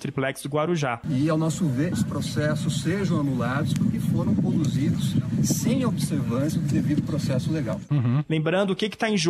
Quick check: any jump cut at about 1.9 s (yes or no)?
yes